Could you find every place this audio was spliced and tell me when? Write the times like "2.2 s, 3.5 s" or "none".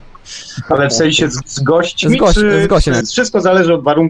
1.4 s, 3.0 s